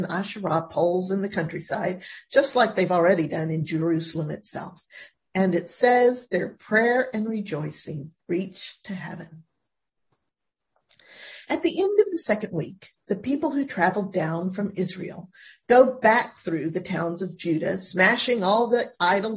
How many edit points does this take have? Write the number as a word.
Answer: two